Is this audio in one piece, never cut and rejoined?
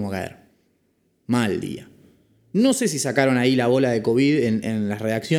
yes; 0 cuts

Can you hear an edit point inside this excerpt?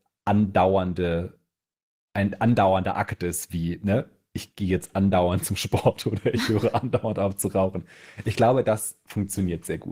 no; 0 cuts

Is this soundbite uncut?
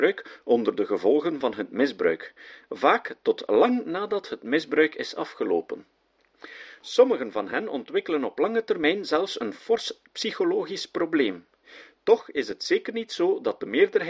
yes; 0 cuts

